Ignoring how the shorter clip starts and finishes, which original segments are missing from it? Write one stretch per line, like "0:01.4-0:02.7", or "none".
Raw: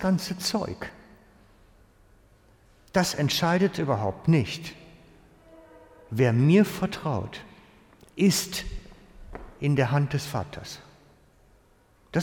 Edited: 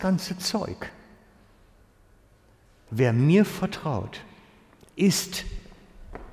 0:02.9-0:06.1